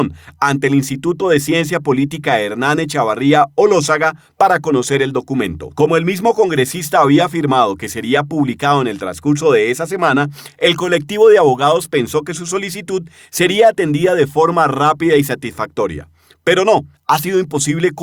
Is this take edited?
yes; 1 cut; at 16.9 s

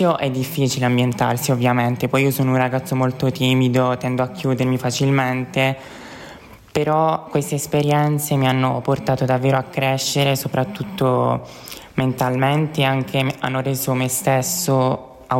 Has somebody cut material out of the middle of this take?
no; 0 cuts

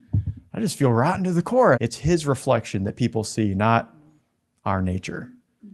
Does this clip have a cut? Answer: yes; 1 cut; at 1.7 s

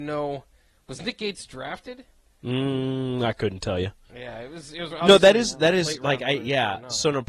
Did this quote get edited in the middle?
no; 0 cuts

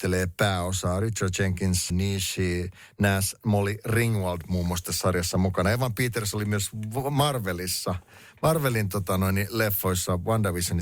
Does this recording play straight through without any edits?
no; 1 cut; at 1.9 s

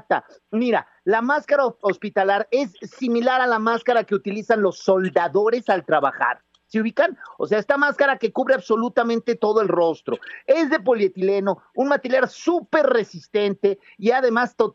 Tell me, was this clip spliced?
no; 0 cuts

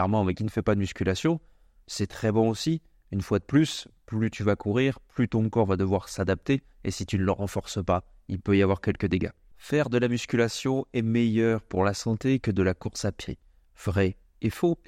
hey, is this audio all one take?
no; 1 cut; at 9.5 s

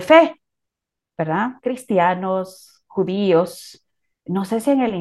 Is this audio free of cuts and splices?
yes; 0 cuts

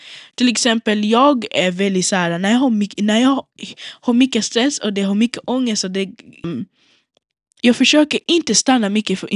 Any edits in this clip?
yes; 1 cut; at 6.4 s

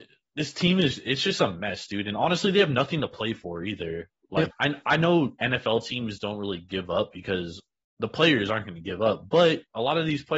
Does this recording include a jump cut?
yes; 1 cut; at 4.5 s

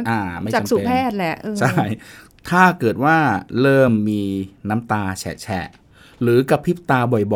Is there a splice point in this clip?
no; 0 cuts

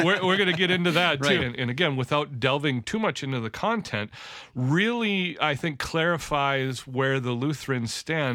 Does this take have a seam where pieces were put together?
yes; 1 cut; at 1.4 s

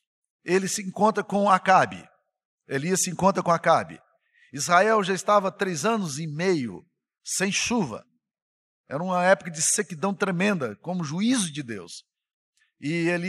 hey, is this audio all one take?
yes; 0 cuts

